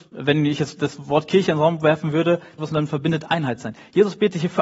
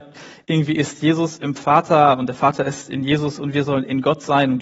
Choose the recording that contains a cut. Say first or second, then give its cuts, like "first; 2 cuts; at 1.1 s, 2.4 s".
first; 1 cut; at 2.6 s